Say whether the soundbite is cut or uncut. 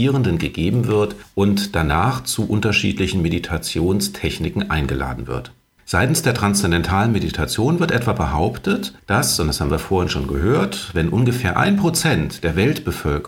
cut